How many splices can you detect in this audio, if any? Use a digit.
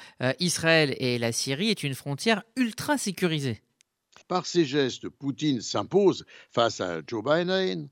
1